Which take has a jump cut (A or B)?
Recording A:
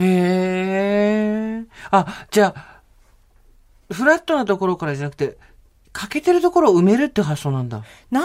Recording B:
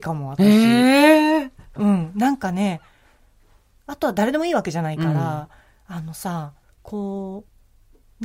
B